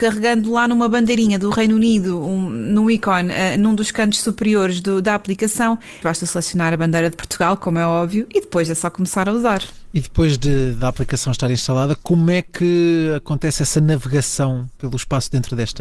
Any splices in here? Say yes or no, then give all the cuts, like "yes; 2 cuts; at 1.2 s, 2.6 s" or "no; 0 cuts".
yes; 1 cut; at 6.0 s